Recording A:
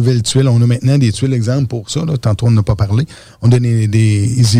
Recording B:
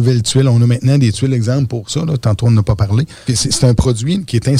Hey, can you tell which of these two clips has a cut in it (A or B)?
B